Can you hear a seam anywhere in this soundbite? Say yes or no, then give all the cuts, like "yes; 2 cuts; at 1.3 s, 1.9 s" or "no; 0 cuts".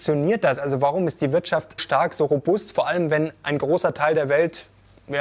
yes; 1 cut; at 1.8 s